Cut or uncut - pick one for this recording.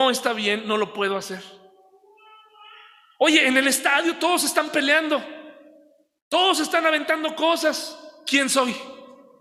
uncut